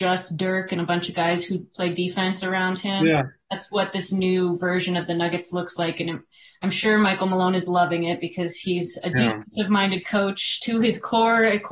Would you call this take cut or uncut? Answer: uncut